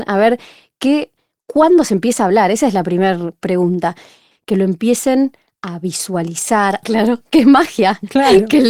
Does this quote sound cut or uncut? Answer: cut